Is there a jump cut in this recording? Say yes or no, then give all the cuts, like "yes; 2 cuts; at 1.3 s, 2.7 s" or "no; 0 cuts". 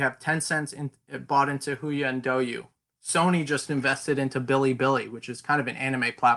no; 0 cuts